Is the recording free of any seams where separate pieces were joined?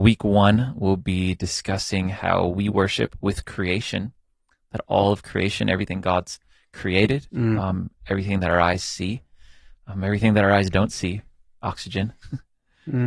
yes; 0 cuts

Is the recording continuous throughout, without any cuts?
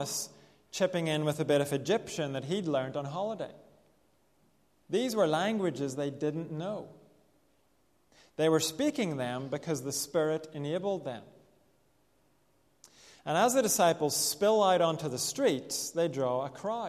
yes; 0 cuts

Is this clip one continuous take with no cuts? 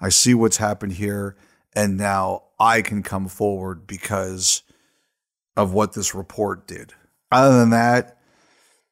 yes; 0 cuts

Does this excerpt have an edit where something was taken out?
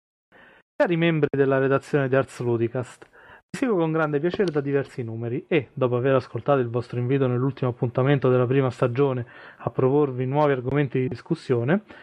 no; 0 cuts

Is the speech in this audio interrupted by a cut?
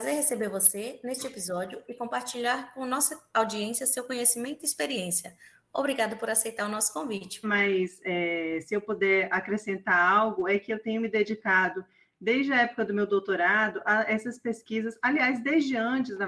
yes; 1 cut; at 7.4 s

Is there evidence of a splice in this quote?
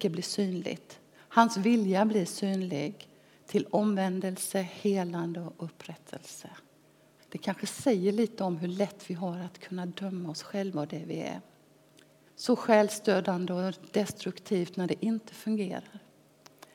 yes; 2 cuts; at 7.2 s, 12.3 s

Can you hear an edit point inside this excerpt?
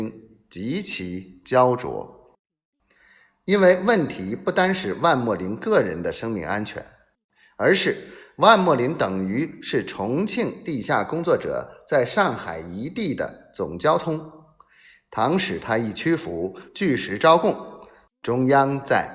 no; 0 cuts

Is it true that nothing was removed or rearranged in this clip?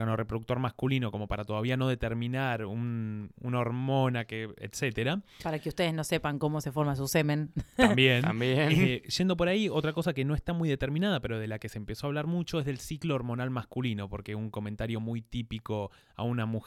yes; 0 cuts

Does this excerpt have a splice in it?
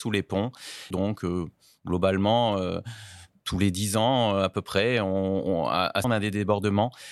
yes; 2 cuts; at 0.9 s, 6.0 s

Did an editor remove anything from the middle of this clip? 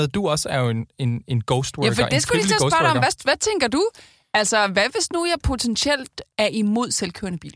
no; 0 cuts

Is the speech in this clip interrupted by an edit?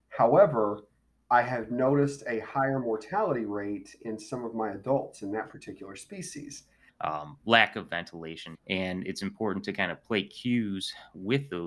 yes; 2 cuts; at 6.9 s, 8.5 s

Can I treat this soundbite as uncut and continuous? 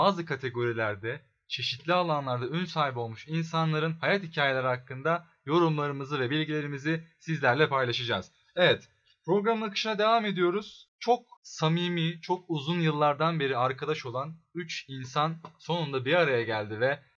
yes; 0 cuts

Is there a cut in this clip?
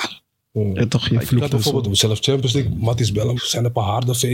yes; 2 cuts; at 1.8 s, 3.4 s

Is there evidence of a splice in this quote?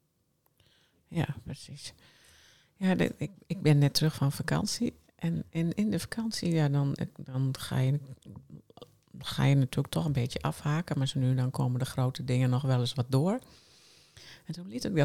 no; 0 cuts

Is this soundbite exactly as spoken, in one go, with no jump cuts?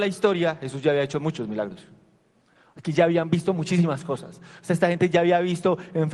yes; 0 cuts

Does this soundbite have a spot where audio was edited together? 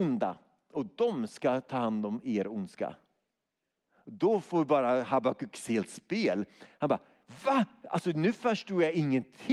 no; 0 cuts

